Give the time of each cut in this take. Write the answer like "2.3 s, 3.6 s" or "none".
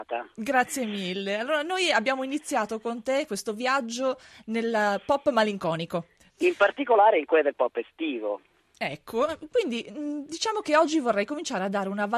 6.3 s

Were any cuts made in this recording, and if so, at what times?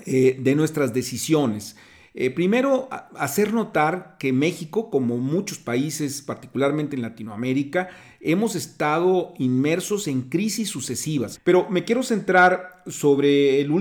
11.3 s

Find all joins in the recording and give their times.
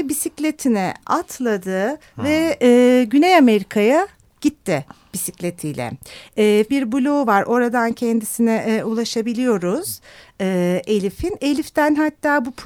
6.7 s

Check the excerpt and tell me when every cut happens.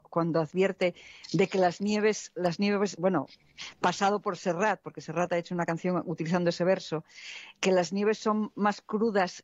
none

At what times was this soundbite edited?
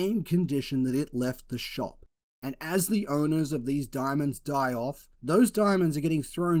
2.3 s, 5.1 s

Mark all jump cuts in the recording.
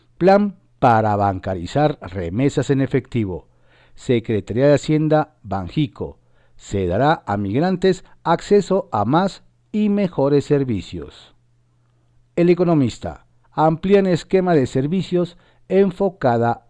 13.4 s

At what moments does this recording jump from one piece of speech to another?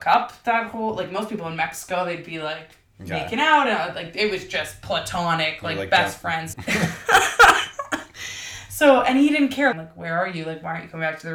6.5 s, 9.7 s

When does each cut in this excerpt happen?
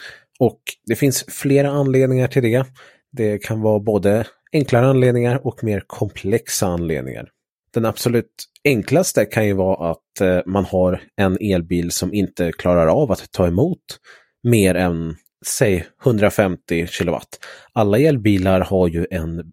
15.3 s

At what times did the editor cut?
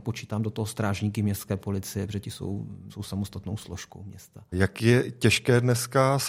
2.9 s, 4.5 s

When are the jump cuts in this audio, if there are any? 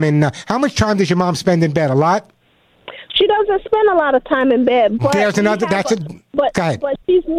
none

